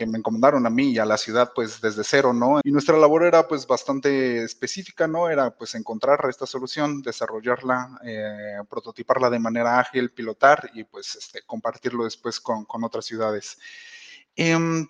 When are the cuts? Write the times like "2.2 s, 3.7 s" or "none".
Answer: 2.6 s